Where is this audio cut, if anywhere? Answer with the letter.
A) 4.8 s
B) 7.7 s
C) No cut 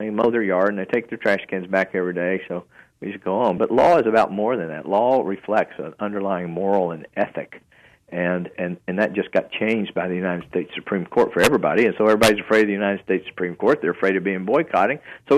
C